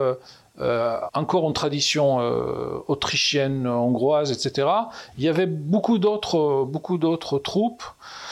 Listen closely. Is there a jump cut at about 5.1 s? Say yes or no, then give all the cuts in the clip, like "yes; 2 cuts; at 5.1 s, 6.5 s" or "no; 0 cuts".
no; 1 cut; at 1.1 s